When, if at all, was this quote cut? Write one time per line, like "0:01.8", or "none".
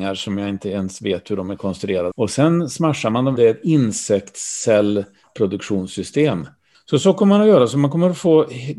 0:02.1
0:03.4
0:06.7